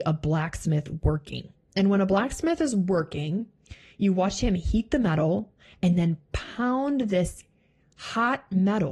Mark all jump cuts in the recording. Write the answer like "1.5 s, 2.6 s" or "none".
1.7 s